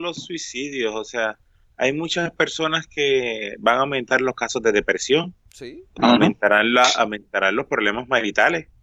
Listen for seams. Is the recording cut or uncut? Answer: uncut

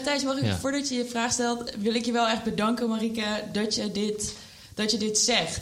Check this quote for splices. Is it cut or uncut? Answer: uncut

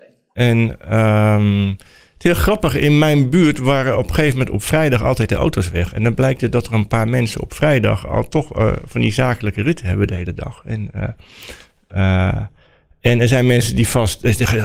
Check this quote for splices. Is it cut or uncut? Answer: uncut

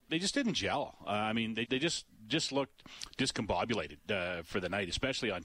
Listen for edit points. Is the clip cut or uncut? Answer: cut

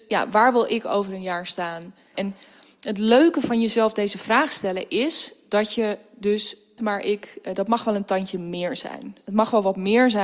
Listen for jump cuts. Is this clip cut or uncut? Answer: cut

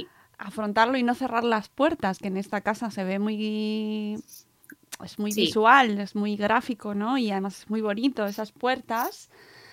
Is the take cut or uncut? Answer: uncut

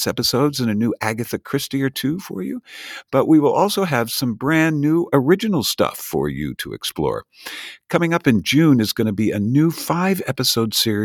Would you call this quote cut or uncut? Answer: uncut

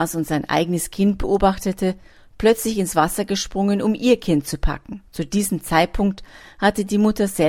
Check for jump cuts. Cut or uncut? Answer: cut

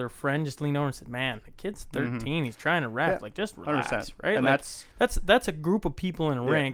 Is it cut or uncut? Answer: uncut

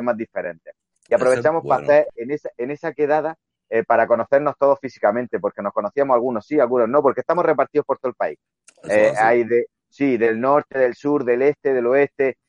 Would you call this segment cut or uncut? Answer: uncut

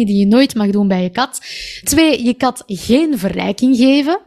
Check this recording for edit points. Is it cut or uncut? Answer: cut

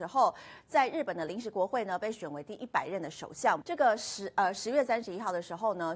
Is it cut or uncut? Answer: cut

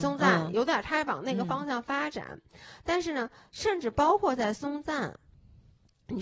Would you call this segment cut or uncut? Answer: uncut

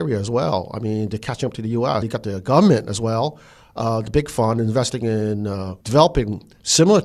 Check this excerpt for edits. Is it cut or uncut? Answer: cut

